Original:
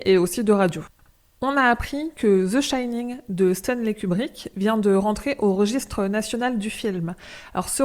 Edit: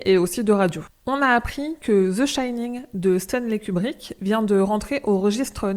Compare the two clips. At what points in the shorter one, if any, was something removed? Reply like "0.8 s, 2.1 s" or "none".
1.0 s